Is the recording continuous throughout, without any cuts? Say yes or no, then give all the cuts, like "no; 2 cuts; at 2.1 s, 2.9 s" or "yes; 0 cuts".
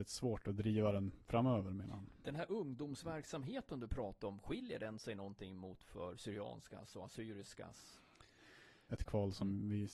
no; 1 cut; at 8.9 s